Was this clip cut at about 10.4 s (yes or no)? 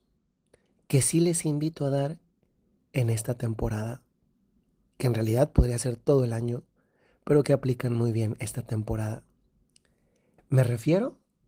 yes